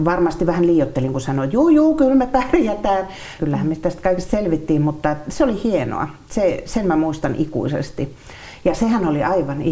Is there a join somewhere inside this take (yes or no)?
yes